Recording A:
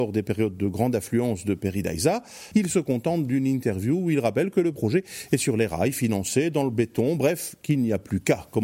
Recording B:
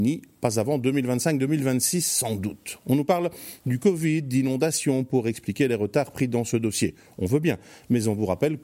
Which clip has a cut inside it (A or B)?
A